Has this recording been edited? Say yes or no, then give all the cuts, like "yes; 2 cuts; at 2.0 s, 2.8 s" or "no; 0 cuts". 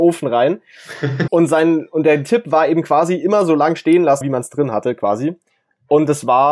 yes; 2 cuts; at 1.3 s, 4.2 s